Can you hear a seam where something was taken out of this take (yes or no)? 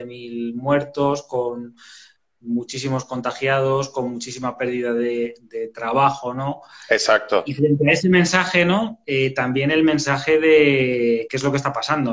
no